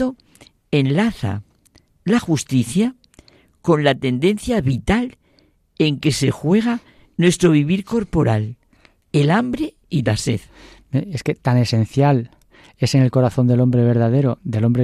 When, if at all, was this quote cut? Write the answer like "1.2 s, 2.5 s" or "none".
none